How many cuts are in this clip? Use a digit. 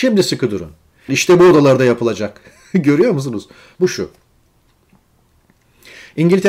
2